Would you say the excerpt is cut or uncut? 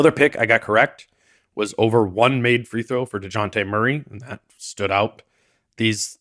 uncut